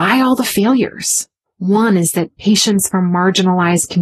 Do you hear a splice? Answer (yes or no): yes